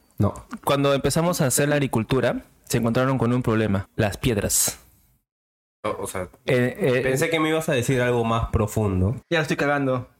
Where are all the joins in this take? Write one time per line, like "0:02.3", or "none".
0:03.8
0:09.2